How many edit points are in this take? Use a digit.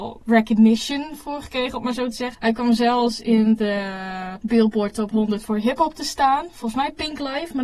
1